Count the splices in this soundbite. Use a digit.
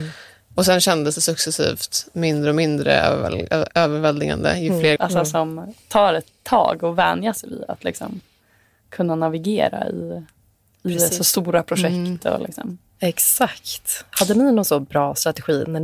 1